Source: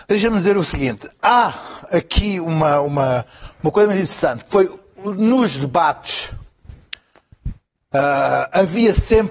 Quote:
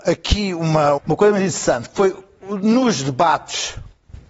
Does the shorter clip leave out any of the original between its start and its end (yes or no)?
yes